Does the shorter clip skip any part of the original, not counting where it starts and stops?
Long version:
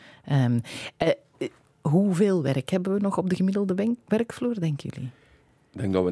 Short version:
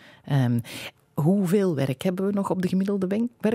yes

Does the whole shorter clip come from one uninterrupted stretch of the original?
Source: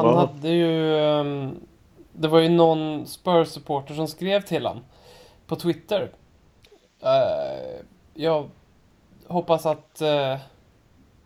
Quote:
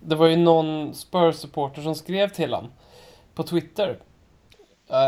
yes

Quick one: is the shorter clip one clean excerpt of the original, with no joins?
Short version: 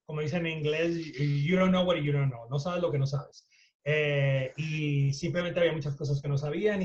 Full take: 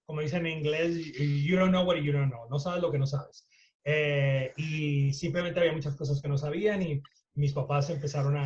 yes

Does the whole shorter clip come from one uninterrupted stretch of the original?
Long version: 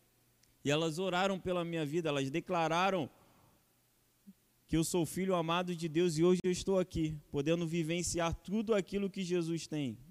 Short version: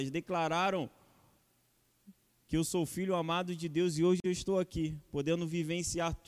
yes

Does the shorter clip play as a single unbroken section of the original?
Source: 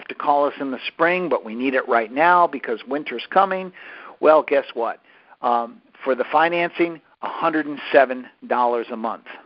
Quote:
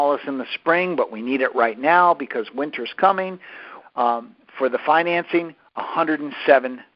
no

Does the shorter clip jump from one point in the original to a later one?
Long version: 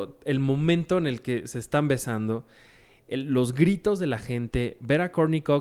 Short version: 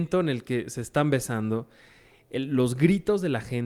no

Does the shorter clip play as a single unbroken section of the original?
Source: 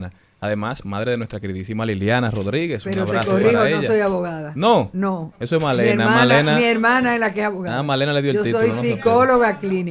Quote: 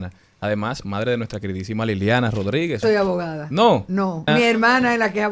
no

